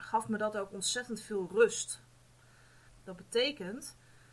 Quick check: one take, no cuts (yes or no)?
no